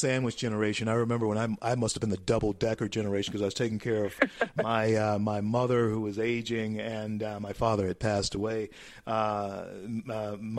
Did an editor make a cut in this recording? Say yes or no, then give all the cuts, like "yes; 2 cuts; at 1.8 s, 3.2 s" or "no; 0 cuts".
no; 0 cuts